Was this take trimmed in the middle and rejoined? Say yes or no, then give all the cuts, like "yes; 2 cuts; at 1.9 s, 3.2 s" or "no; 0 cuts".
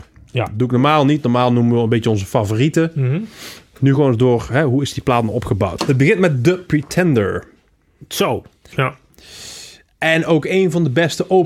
yes; 2 cuts; at 5.8 s, 8.7 s